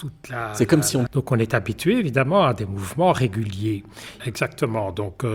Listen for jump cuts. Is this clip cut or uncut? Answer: cut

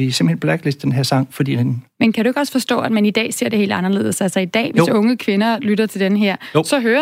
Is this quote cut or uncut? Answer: uncut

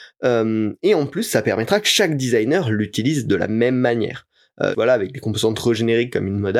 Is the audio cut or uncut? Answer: cut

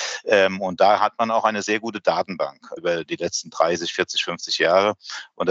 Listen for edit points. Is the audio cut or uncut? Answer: cut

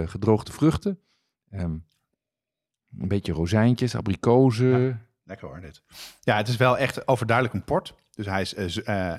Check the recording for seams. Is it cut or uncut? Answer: uncut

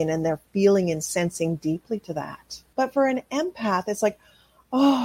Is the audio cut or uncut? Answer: cut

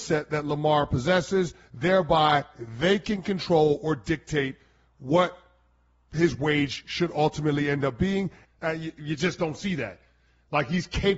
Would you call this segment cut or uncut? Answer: cut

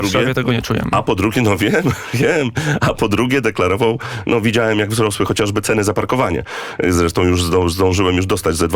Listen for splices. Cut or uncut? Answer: uncut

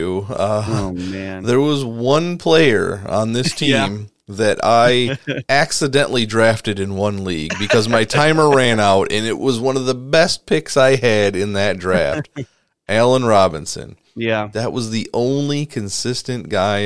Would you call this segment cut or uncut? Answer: uncut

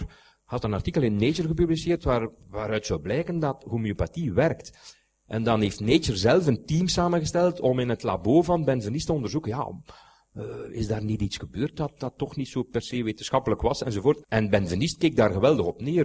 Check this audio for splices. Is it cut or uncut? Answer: cut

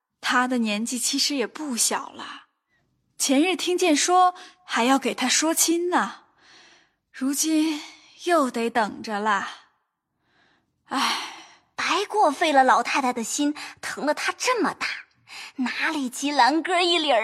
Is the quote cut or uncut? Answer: cut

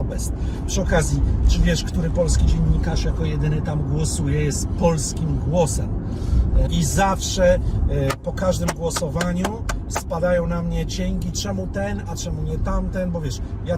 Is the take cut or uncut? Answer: cut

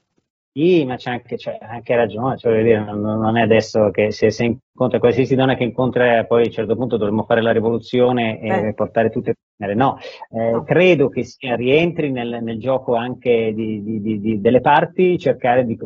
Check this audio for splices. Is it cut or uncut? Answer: uncut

